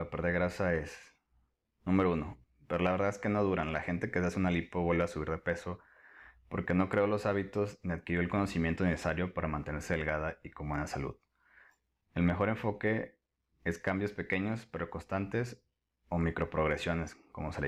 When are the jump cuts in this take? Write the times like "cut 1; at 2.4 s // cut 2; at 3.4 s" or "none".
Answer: cut 1; at 2.4 s